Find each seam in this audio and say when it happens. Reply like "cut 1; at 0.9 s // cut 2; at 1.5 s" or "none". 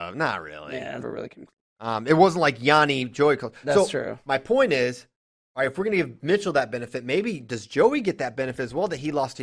cut 1; at 1.0 s